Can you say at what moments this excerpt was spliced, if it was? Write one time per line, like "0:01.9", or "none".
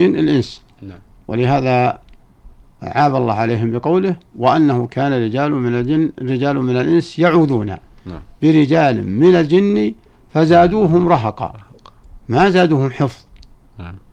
none